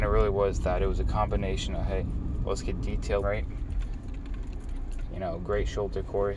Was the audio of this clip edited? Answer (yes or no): yes